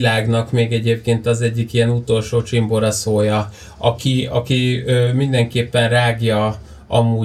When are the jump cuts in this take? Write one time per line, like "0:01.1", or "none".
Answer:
none